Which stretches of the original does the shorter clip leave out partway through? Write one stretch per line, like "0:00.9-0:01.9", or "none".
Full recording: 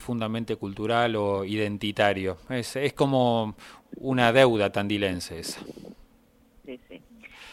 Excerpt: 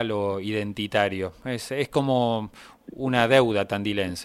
none